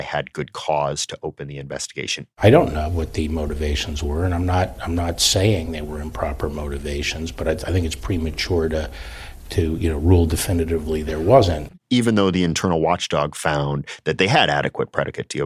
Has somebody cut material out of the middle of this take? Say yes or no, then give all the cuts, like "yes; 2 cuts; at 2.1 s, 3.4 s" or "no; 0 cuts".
no; 0 cuts